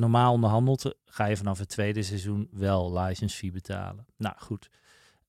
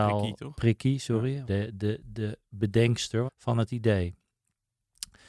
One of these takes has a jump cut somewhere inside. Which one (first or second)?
second